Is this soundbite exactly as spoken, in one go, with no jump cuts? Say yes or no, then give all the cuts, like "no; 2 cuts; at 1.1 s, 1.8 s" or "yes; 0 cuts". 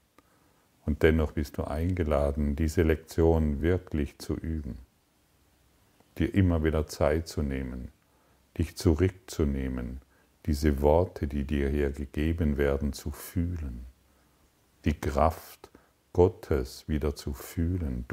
yes; 0 cuts